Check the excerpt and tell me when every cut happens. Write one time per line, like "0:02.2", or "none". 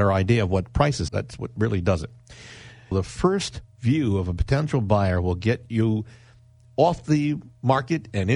0:01.1
0:02.9